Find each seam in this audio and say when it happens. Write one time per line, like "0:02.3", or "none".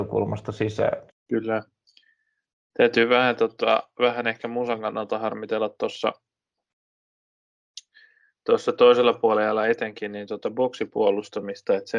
0:01.1